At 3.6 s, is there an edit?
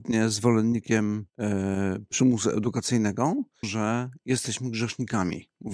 yes; 2 cuts; at 1.3 s, 3.6 s

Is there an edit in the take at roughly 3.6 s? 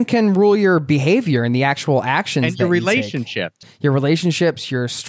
yes; 1 cut; at 3.6 s

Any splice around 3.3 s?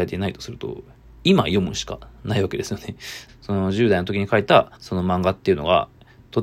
yes; 2 cuts; at 3.3 s, 4.8 s

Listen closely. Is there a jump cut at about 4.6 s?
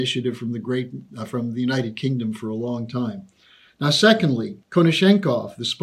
yes; 1 cut; at 4.6 s

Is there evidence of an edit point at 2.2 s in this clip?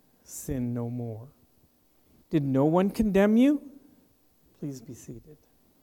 yes; 2 cuts; at 2.2 s, 4.4 s

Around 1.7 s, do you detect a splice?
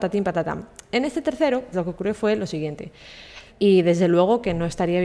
yes; 2 cuts; at 1.7 s, 3.5 s

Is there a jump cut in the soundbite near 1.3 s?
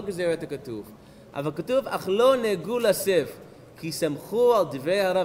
yes; 1 cut; at 1.3 s

